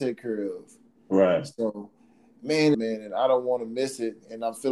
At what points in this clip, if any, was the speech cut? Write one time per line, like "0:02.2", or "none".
0:02.7